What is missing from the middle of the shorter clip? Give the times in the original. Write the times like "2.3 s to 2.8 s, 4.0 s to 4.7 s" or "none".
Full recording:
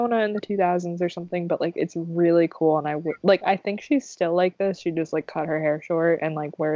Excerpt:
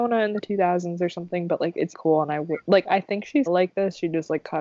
1.9 s to 2.5 s, 4.0 s to 4.3 s